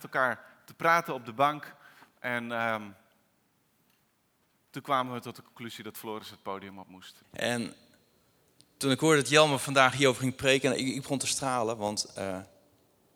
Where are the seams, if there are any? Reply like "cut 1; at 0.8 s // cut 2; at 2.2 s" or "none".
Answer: cut 1; at 7.2 s